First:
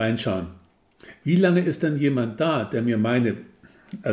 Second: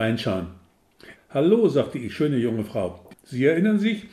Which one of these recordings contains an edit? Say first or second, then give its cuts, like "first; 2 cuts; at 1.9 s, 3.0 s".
second; 2 cuts; at 1.2 s, 3.1 s